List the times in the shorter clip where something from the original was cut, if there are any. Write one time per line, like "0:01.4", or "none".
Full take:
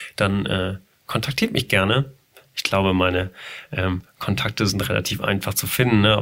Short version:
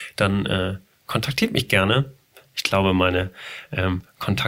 none